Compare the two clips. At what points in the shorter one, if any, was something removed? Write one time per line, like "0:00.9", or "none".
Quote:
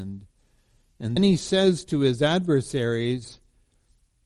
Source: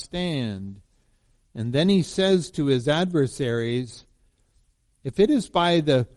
0:01.2